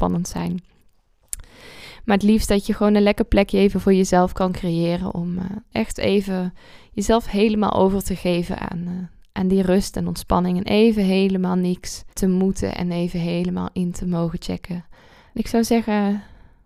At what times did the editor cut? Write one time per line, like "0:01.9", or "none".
0:12.1
0:15.3